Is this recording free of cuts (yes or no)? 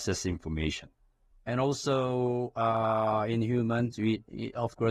no